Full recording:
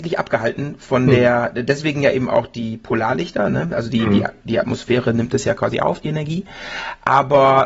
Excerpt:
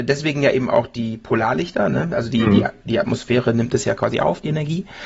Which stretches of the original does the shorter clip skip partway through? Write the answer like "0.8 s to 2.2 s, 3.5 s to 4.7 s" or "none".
none